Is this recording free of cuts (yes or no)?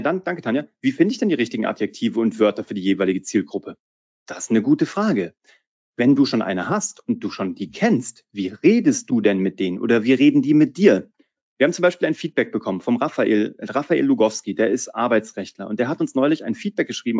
yes